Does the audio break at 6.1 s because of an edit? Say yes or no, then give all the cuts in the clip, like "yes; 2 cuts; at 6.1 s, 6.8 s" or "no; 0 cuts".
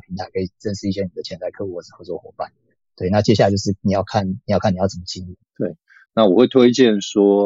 yes; 1 cut; at 6.1 s